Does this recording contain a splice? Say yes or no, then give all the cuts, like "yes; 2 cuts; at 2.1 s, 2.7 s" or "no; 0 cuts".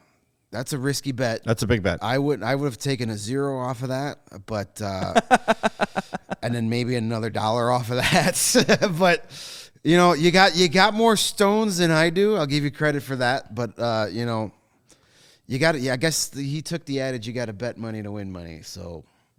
no; 0 cuts